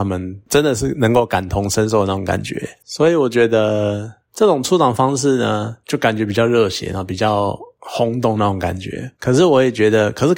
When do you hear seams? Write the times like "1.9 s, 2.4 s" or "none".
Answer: 4.3 s

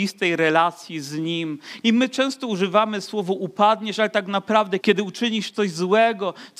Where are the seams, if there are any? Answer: 1.8 s, 4.8 s

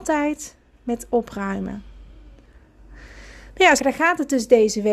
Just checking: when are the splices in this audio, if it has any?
3.8 s

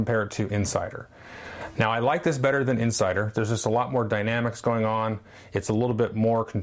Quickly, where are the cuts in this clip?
none

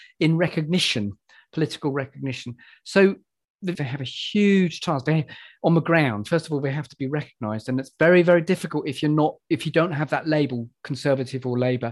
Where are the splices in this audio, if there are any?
3.8 s

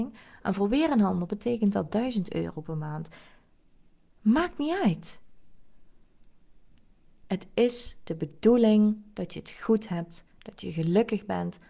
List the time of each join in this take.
7.2 s

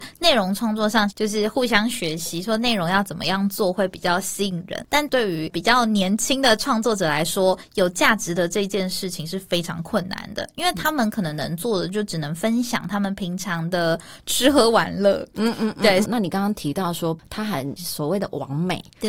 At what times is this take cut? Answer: 1.1 s, 4.9 s, 16.0 s

